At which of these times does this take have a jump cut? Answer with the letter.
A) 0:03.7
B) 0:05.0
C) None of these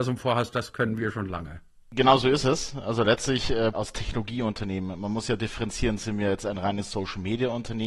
A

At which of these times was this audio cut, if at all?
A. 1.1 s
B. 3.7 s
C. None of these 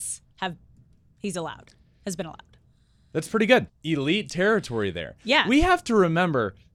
B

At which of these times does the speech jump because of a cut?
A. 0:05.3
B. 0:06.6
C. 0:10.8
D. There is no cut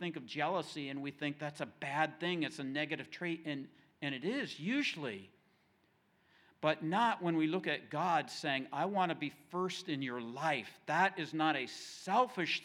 D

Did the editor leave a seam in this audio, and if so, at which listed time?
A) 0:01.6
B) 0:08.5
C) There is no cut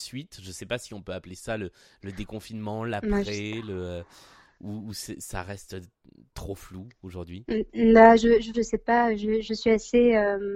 B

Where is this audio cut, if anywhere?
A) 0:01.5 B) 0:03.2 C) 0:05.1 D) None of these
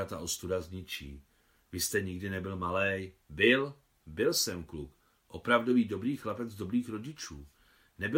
B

